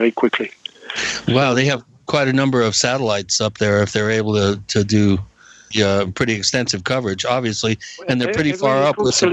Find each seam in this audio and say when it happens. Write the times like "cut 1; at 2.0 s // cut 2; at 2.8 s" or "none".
none